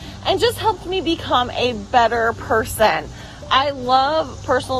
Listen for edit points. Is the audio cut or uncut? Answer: uncut